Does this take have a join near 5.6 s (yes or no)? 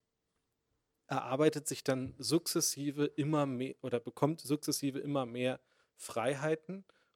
no